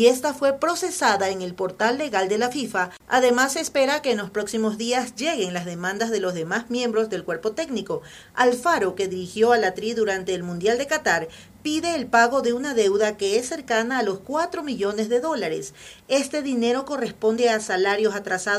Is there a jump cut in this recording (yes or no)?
no